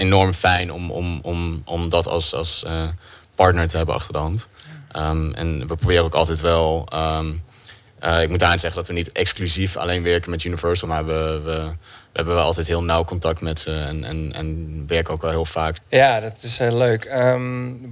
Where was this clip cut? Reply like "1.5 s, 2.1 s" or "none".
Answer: 10.8 s, 15.7 s